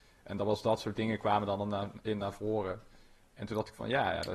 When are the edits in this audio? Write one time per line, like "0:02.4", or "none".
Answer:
none

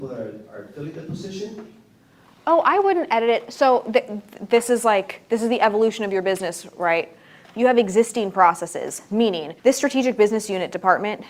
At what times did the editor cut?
0:07.4
0:09.6

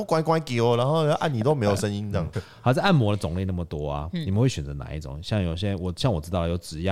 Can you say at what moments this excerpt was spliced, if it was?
0:02.3

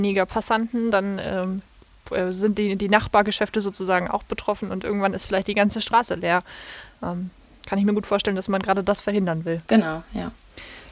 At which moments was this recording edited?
0:09.6

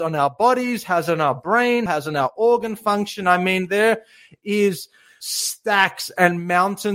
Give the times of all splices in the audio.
0:01.9

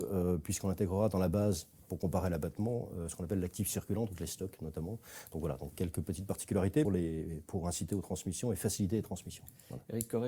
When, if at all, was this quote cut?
0:06.8

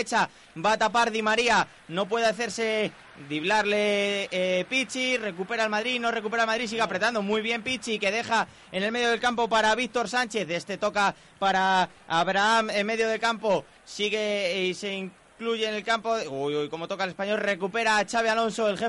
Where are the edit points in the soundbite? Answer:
none

